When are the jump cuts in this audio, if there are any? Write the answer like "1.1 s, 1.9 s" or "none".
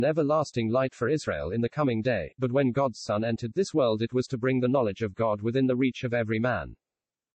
none